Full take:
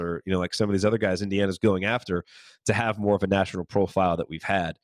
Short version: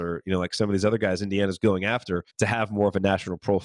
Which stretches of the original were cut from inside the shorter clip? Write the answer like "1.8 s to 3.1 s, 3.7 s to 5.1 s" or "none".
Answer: 2.3 s to 2.6 s

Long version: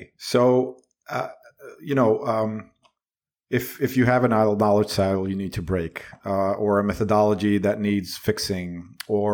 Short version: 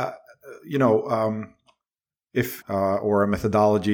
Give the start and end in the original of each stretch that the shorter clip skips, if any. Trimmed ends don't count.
3.8 s to 6.2 s

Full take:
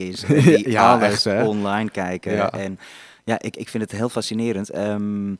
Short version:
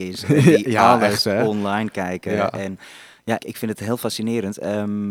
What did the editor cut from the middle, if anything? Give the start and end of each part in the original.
3.4 s to 3.5 s

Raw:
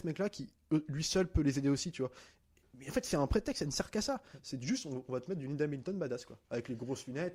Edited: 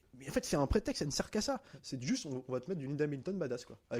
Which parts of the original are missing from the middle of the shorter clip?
none

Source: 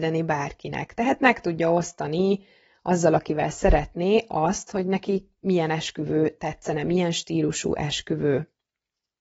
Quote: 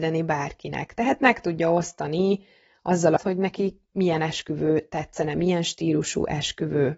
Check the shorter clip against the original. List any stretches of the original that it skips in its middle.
3.2 s to 4.7 s

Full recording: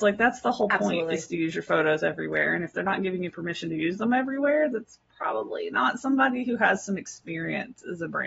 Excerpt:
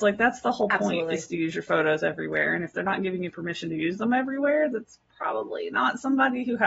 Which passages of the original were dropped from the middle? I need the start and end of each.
none

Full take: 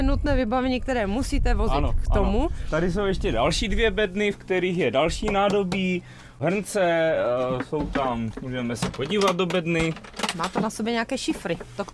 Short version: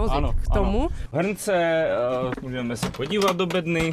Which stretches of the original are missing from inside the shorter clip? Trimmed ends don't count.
2.7 s to 6.3 s, 7.6 s to 8.3 s

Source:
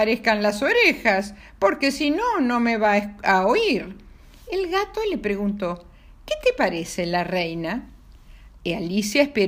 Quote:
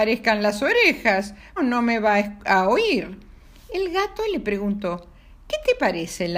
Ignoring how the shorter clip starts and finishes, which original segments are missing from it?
1.6 s to 2.3 s

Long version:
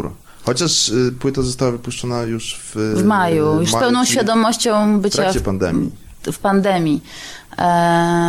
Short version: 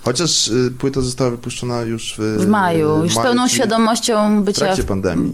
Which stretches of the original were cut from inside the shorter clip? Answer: 2.6 s to 2.7 s

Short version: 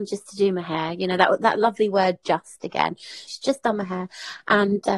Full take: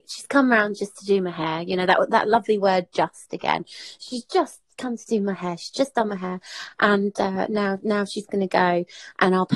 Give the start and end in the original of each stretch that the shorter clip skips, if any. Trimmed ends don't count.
4.0 s to 5.6 s

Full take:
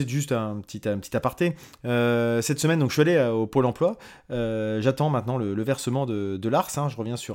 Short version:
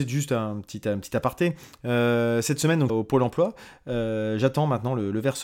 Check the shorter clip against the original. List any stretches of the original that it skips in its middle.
2.9 s to 3.3 s

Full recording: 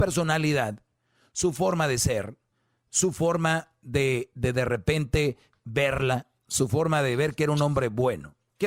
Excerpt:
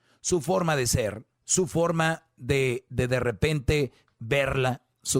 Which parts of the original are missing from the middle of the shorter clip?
2.4 s to 2.8 s

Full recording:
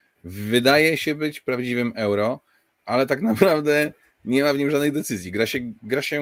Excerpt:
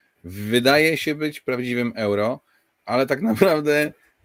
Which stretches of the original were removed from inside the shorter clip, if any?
none

